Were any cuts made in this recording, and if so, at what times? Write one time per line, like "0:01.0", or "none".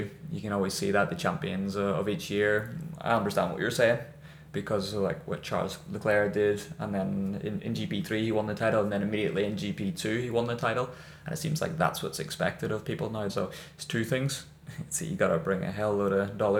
0:04.5
0:13.3

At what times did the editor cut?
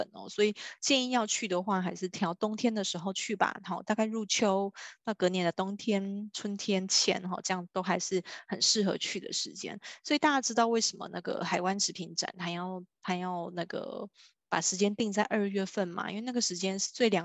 none

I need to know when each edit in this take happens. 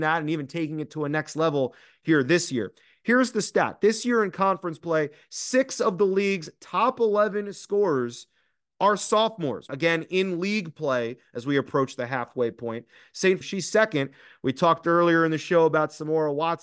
0:09.7
0:13.4

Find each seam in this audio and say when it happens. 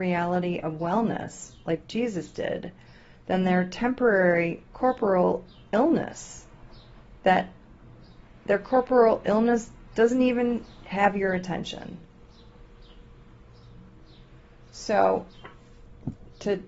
none

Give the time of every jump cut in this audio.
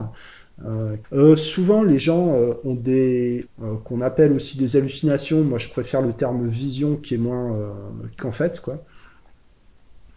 0:01.0
0:03.5
0:08.2

